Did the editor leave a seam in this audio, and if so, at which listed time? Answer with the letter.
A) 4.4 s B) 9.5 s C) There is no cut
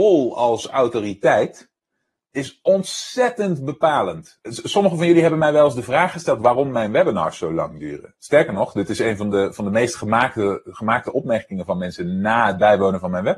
A